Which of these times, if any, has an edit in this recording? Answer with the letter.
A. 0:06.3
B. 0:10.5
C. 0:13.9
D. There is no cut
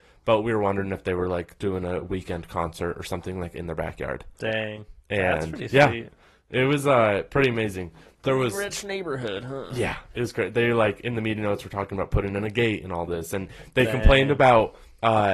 D